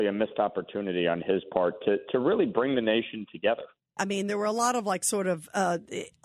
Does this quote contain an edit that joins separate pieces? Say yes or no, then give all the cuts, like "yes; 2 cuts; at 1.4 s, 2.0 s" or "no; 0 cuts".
yes; 1 cut; at 4.0 s